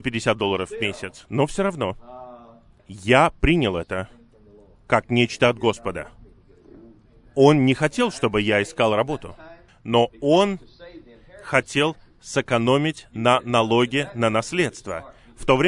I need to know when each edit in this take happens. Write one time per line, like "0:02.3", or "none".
0:02.8
0:09.7

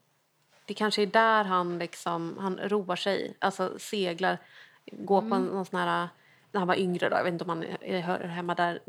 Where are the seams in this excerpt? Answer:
none

